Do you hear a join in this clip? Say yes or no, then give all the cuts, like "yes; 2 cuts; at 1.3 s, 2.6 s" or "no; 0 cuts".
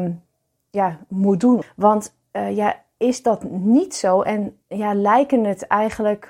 yes; 1 cut; at 1.6 s